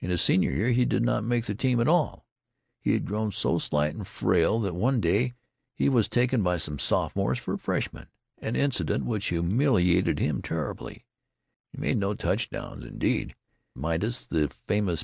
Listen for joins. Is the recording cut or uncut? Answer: cut